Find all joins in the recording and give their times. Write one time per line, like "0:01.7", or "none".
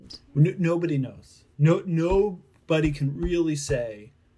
none